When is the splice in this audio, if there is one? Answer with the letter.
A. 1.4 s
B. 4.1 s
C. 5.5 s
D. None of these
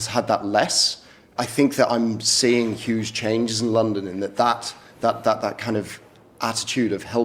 A